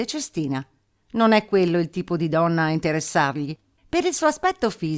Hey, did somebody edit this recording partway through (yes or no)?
yes